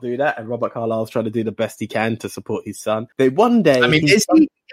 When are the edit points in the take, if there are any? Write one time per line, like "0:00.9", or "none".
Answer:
0:03.1